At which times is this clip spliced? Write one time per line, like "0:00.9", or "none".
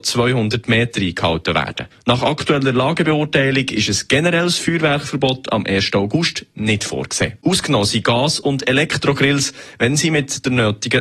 0:07.4